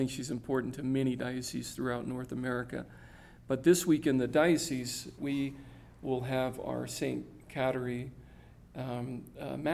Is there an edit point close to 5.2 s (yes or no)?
yes